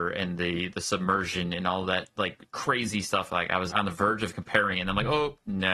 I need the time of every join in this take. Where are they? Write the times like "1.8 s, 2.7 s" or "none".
2.5 s, 3.7 s